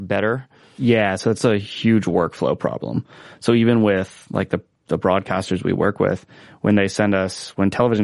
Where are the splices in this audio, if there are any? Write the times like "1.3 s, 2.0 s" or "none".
none